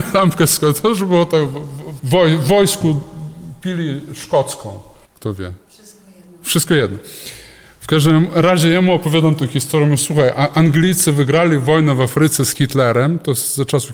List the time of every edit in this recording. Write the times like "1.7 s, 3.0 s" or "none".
2.0 s, 5.0 s